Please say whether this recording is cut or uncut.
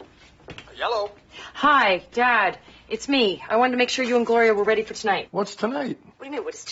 uncut